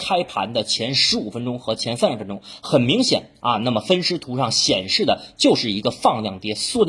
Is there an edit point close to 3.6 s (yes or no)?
no